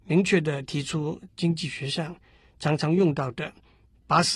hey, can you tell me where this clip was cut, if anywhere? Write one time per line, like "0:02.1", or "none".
0:01.3

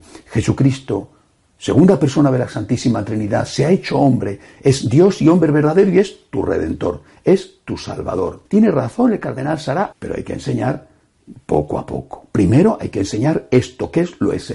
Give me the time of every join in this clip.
0:08.5
0:09.9

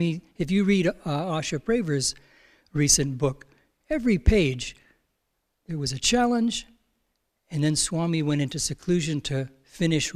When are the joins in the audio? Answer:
none

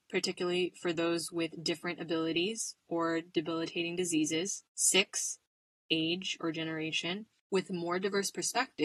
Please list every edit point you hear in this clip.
0:04.7
0:07.4

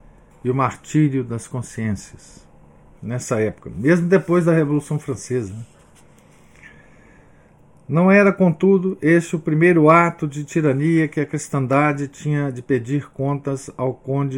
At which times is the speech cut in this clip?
0:02.9

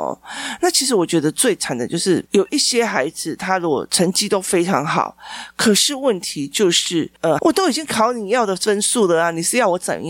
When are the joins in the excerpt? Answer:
0:07.4

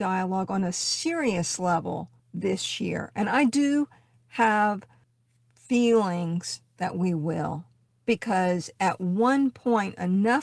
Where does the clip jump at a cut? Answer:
0:02.2

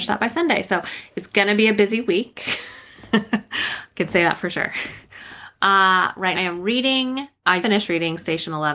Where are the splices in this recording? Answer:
0:06.3
0:07.6

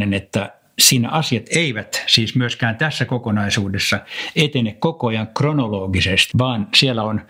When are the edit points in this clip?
0:06.3

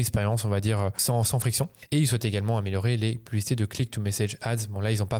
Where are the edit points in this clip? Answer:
none

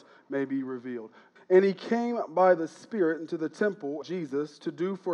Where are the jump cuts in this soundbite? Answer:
0:01.4
0:04.0

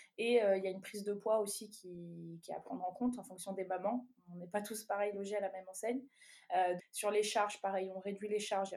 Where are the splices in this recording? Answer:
0:06.8

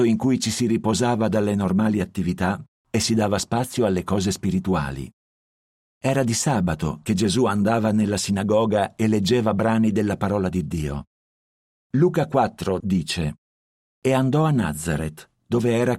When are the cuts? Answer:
0:12.8

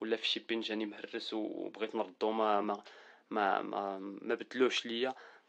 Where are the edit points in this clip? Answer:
none

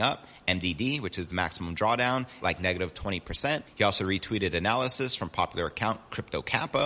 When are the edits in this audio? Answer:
0:02.4

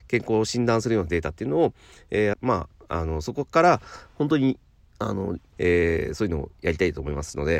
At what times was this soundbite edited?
0:02.3
0:05.5

